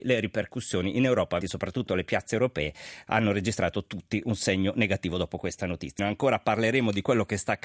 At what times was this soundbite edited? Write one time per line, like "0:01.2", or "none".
0:01.4
0:06.0